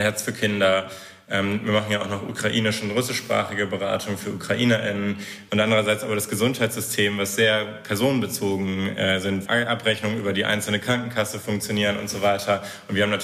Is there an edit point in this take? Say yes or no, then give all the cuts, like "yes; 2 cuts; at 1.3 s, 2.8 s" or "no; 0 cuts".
yes; 2 cuts; at 5.5 s, 9.4 s